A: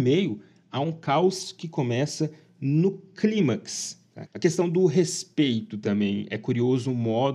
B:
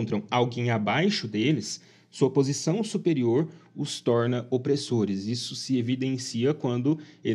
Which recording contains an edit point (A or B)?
A